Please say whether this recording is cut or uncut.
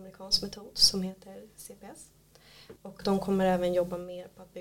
cut